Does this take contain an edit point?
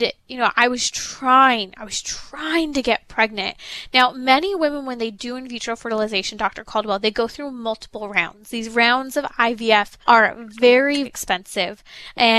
yes; 2 cuts; at 10.0 s, 11.0 s

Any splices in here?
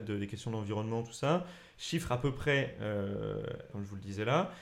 yes; 1 cut; at 3.7 s

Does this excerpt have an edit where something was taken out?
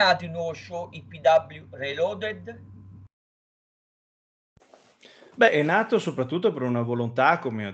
no; 0 cuts

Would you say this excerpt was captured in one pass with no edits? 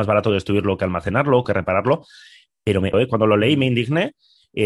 no; 2 cuts; at 1.4 s, 2.9 s

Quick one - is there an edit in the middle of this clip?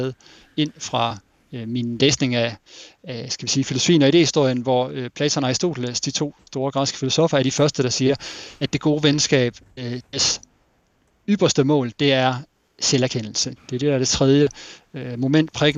yes; 1 cut; at 13.6 s

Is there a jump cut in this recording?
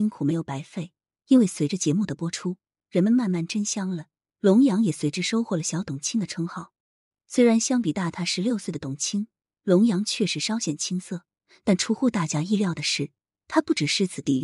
no; 0 cuts

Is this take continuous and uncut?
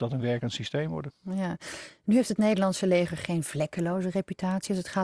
yes; 0 cuts

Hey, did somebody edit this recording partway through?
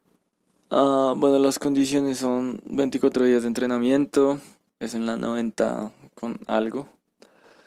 yes; 1 cut; at 4.7 s

